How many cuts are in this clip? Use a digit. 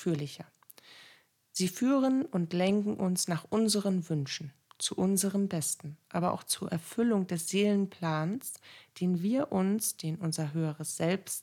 0